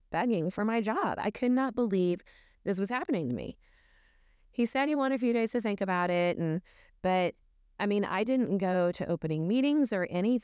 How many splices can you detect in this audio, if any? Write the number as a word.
zero